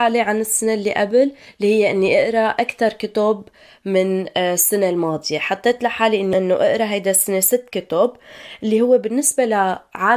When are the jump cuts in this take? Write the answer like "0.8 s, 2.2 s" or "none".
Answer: none